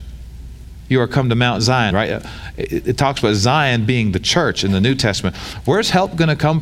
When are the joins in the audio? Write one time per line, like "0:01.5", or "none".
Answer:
0:01.9